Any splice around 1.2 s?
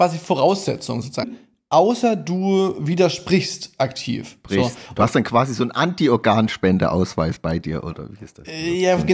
yes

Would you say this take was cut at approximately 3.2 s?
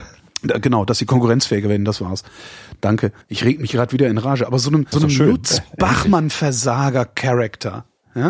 yes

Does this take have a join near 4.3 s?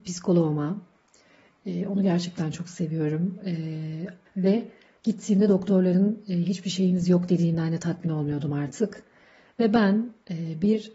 yes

